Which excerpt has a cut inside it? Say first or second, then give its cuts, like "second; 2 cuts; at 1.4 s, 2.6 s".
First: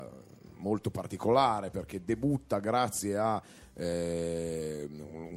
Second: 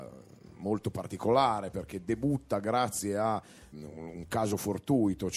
second; 1 cut; at 3.7 s